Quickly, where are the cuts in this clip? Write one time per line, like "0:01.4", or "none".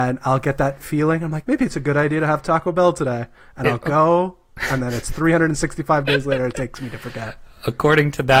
0:01.4